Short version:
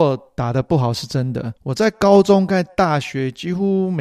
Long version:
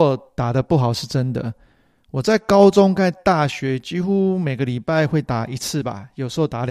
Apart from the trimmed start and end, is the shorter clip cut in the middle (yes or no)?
yes